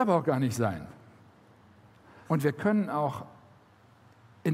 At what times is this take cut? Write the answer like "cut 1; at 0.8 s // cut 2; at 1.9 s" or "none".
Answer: cut 1; at 2.3 s